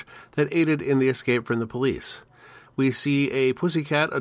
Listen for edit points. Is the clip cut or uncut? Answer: uncut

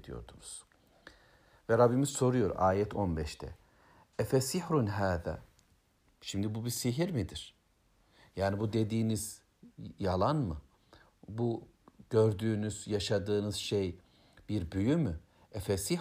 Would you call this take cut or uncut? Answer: uncut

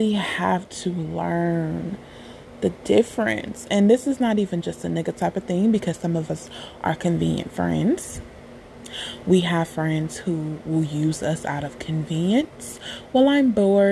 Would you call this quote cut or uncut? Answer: uncut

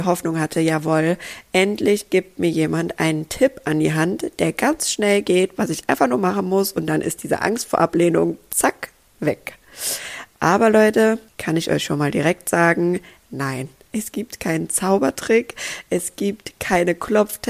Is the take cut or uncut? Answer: cut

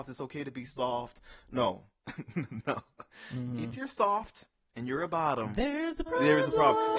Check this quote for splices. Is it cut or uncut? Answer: cut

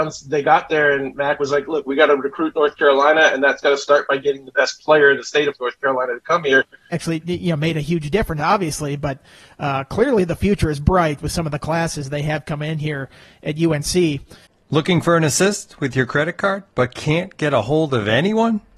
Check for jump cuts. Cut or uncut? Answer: cut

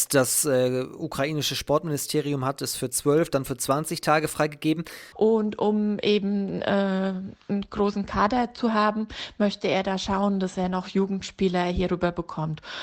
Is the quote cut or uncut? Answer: cut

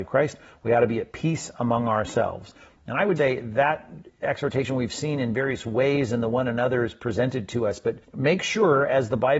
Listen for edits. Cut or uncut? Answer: cut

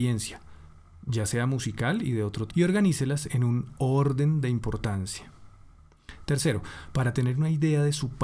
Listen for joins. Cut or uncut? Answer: cut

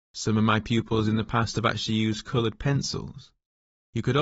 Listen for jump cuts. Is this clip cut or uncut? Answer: uncut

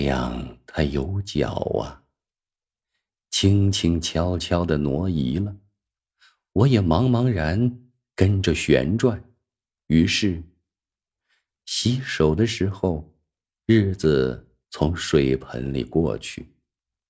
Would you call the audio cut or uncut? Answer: cut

